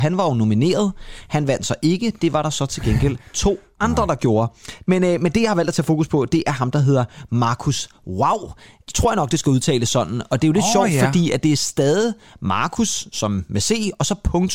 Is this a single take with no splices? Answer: yes; 0 cuts

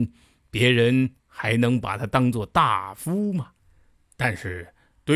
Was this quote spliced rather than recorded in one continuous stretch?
no; 0 cuts

